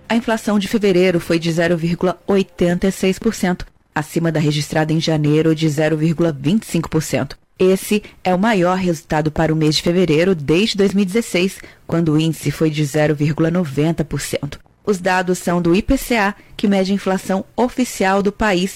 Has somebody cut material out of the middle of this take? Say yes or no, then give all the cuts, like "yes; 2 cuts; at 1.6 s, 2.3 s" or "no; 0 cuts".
yes; 1 cut; at 16.5 s